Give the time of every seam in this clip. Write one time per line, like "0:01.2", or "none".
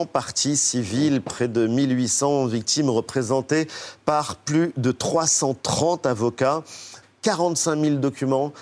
0:07.0